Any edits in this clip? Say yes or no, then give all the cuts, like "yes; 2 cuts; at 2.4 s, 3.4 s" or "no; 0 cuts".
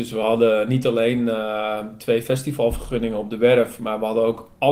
no; 0 cuts